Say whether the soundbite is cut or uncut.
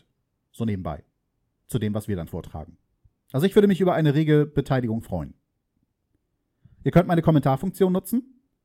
uncut